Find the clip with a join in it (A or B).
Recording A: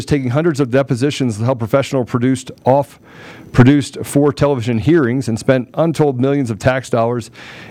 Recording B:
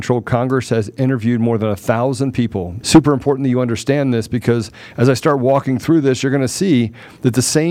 B